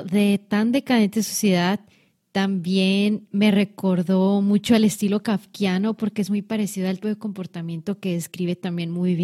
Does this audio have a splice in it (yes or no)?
yes